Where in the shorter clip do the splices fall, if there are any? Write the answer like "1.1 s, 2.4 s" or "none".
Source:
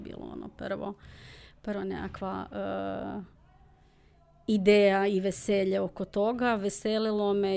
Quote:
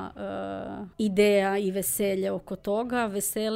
0.9 s